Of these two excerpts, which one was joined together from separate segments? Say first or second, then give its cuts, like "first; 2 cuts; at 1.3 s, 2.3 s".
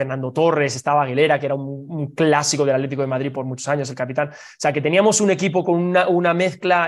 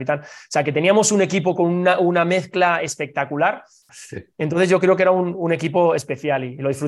second; 1 cut; at 3.9 s